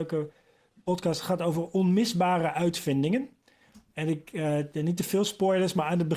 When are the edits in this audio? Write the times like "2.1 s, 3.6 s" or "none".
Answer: none